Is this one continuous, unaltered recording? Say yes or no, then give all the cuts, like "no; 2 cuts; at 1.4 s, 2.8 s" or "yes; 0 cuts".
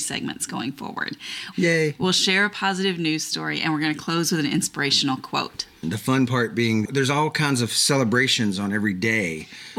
no; 2 cuts; at 1.5 s, 5.8 s